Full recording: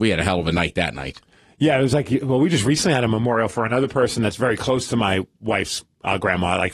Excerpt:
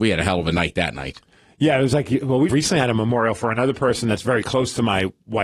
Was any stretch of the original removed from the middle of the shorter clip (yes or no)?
yes